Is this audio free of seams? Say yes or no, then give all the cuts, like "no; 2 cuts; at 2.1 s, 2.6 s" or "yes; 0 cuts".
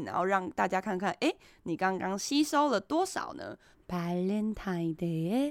no; 1 cut; at 3.7 s